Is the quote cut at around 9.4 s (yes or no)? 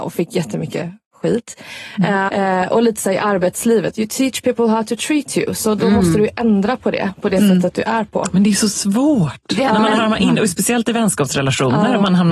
no